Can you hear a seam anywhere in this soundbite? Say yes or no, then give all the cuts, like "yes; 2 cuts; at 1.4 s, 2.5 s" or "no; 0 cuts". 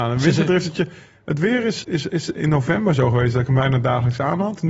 yes; 1 cut; at 1.8 s